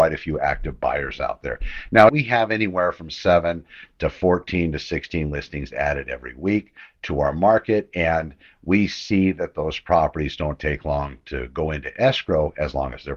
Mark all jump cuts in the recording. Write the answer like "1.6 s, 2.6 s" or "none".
2.1 s